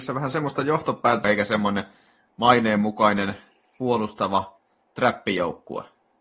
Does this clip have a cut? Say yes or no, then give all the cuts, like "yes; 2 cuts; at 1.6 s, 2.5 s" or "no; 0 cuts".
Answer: yes; 1 cut; at 1.2 s